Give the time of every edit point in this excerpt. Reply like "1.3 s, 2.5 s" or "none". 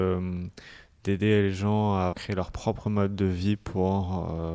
2.1 s

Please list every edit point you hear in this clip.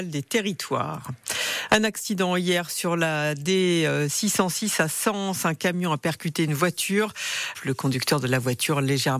7.5 s

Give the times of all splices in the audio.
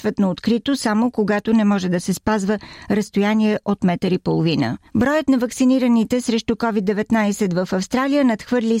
4.9 s

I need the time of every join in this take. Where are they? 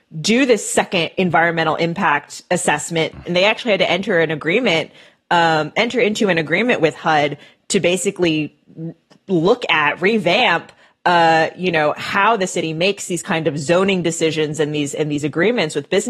none

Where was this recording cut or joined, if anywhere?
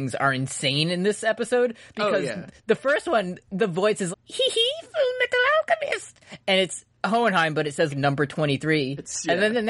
4.1 s, 7.9 s

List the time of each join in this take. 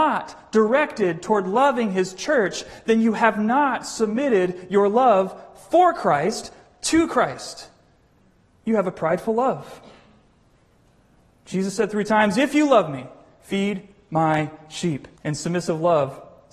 15.2 s

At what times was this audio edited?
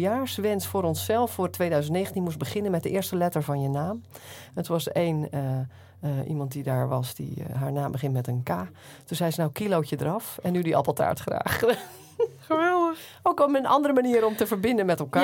none

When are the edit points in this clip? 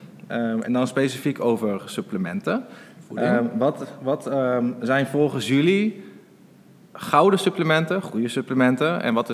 none

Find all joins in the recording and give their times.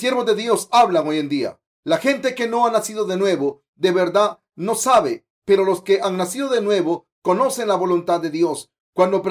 none

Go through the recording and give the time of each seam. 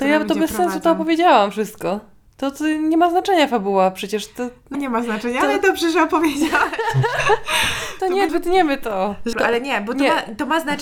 4.7 s, 8.3 s, 9.3 s

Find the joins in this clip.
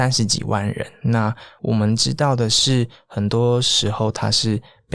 none

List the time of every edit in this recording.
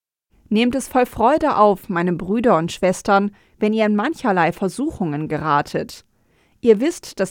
none

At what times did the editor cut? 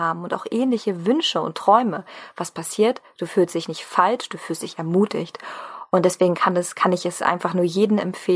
none

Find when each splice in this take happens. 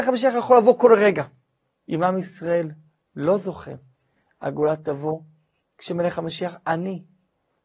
1.8 s

